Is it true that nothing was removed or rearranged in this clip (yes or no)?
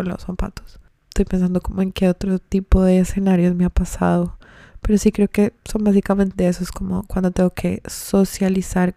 yes